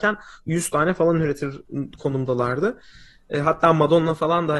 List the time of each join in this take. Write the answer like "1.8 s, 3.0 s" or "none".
none